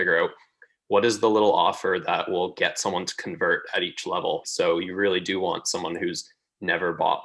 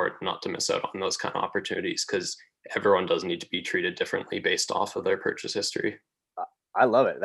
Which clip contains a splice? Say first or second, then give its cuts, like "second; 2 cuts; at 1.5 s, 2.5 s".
first; 1 cut; at 4.4 s